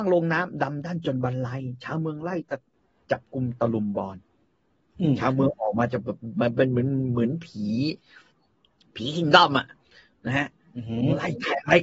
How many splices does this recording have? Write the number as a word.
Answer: zero